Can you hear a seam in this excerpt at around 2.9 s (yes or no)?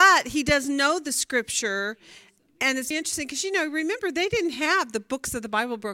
yes